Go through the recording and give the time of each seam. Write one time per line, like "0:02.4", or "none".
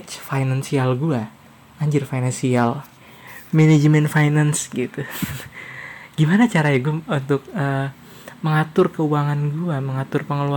none